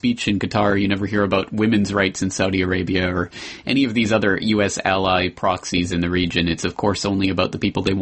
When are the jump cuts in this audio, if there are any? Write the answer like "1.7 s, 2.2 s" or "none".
6.6 s